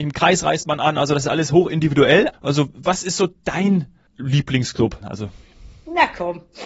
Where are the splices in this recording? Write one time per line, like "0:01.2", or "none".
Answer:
0:02.3
0:05.0